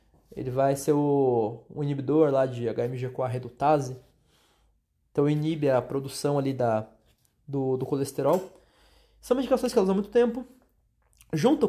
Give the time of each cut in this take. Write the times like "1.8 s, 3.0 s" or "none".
none